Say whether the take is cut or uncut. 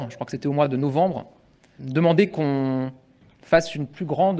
cut